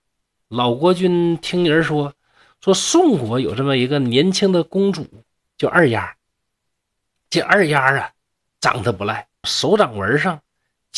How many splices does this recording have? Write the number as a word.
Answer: one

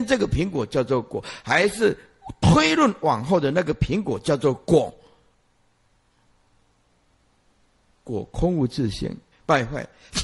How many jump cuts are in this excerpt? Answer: one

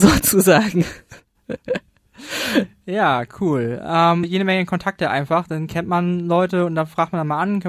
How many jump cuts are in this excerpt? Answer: one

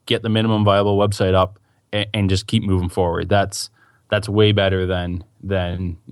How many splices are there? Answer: zero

